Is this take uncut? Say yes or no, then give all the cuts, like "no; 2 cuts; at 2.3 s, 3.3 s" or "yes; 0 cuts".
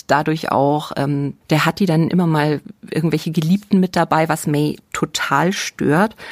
no; 1 cut; at 1.4 s